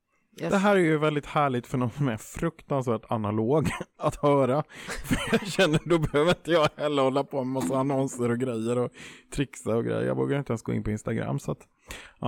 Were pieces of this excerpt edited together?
no; 0 cuts

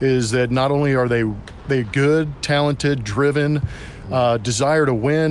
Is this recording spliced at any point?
no; 0 cuts

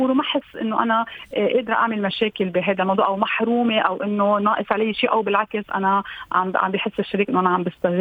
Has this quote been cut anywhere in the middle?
no; 0 cuts

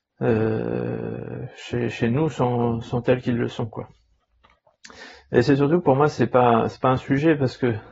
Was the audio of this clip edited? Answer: no; 0 cuts

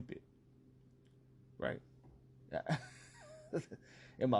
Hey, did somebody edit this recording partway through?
no; 0 cuts

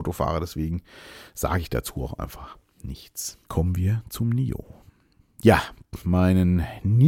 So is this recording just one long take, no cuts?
no; 2 cuts; at 3.5 s, 6.0 s

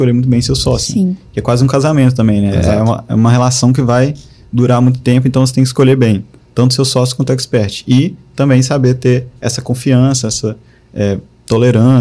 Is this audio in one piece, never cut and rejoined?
yes; 0 cuts

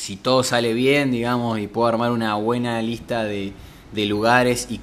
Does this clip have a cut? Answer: no; 0 cuts

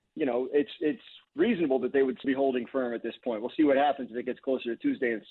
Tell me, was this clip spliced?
yes; 1 cut; at 2.2 s

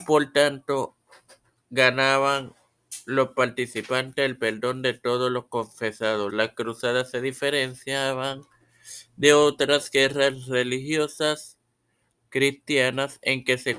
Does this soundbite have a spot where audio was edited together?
yes; 1 cut; at 6.3 s

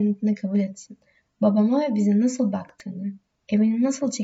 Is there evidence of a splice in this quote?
no; 0 cuts

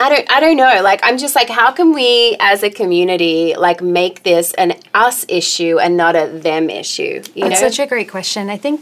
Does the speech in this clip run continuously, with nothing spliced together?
yes; 0 cuts

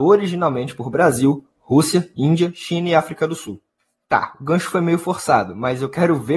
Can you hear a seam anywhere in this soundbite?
no; 0 cuts

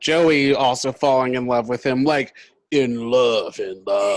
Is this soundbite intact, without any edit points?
yes; 0 cuts

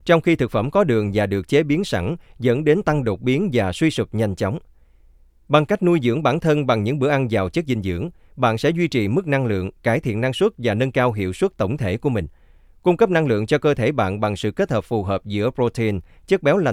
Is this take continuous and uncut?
yes; 0 cuts

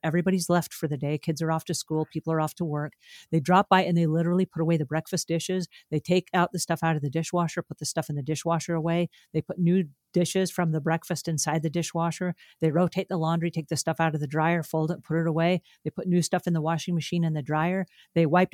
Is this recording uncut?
yes; 0 cuts

